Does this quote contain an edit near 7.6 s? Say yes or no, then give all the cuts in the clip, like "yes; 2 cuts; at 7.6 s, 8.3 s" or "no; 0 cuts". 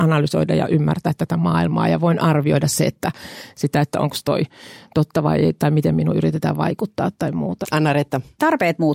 yes; 1 cut; at 7.6 s